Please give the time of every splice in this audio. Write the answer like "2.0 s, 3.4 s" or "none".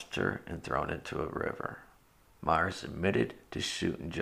2.2 s